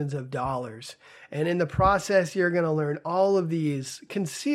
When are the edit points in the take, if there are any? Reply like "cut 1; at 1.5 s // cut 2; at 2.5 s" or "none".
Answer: none